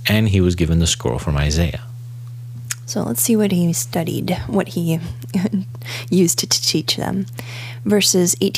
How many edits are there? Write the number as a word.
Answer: zero